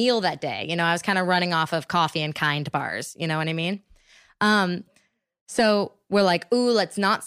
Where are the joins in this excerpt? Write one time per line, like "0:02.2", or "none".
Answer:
none